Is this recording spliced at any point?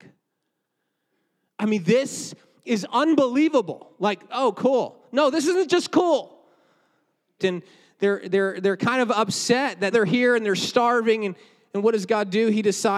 yes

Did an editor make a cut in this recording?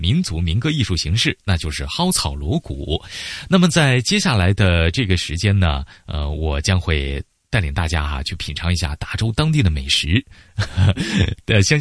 no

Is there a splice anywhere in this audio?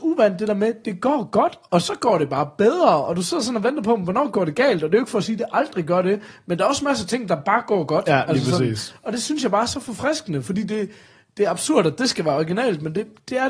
no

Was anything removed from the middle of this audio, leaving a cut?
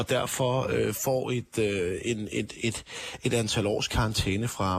no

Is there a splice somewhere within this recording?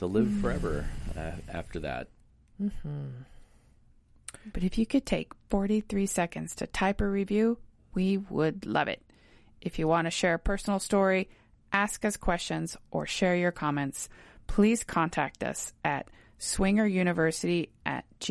yes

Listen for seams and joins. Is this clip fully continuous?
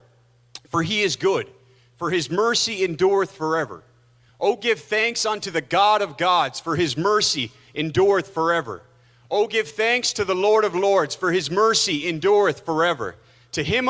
yes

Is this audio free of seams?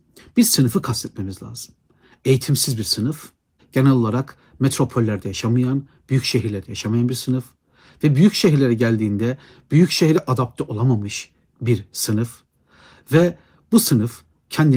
no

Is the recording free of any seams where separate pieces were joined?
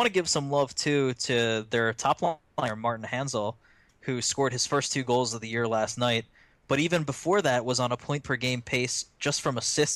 yes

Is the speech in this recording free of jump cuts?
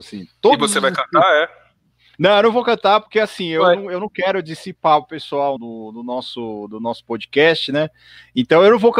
no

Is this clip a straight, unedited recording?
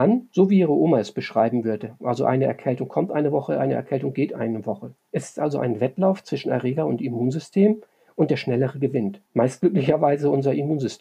no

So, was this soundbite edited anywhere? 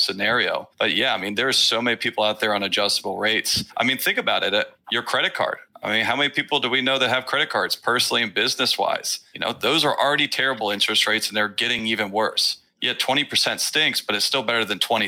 no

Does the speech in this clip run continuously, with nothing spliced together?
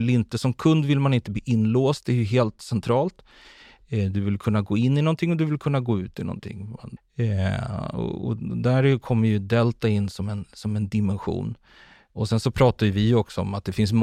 no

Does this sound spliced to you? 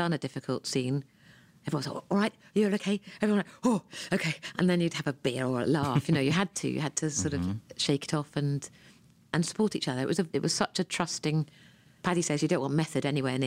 no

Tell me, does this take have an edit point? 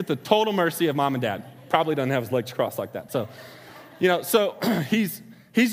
no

